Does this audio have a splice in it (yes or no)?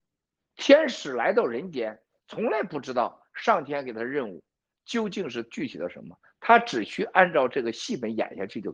no